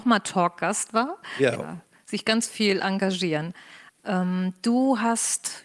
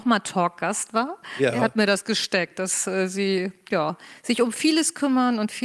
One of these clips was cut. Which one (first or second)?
first